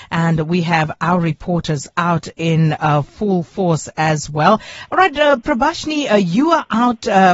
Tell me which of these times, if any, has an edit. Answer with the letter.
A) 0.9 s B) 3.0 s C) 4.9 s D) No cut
C